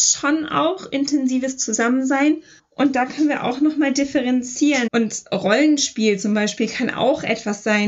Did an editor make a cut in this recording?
yes; 2 cuts; at 2.6 s, 4.9 s

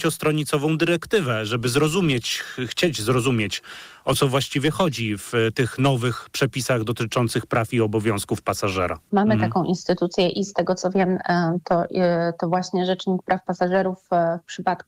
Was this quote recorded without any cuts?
no; 1 cut; at 9.1 s

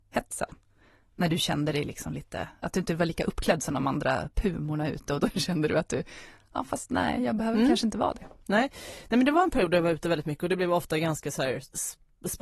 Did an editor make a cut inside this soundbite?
no; 0 cuts

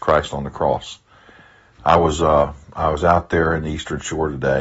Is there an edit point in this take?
no; 0 cuts

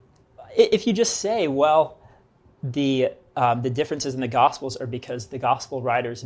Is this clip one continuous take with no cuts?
yes; 0 cuts

